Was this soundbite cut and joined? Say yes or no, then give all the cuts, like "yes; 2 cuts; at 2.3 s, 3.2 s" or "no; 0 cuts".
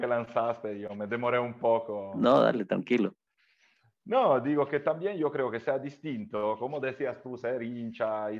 no; 0 cuts